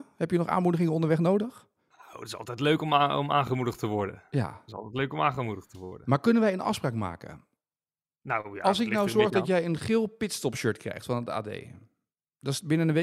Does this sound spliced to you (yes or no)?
no